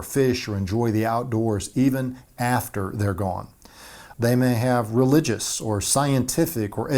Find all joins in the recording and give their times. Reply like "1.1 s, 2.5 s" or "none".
4.1 s